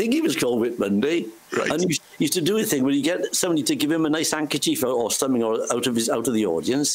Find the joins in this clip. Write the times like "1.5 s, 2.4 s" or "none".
none